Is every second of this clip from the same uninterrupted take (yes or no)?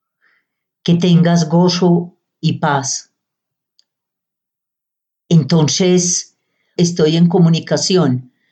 no